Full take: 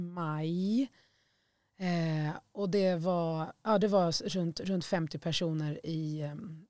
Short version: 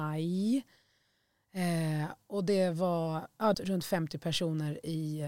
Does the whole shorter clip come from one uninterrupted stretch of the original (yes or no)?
no